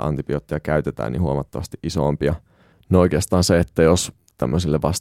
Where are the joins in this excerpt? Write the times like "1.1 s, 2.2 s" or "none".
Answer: 2.7 s